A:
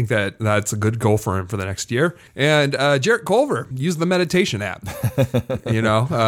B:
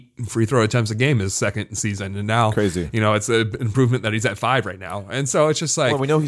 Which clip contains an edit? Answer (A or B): A